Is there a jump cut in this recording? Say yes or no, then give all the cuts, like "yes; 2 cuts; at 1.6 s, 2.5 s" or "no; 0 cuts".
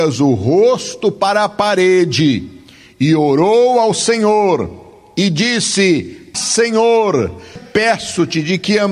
yes; 2 cuts; at 6.3 s, 7.6 s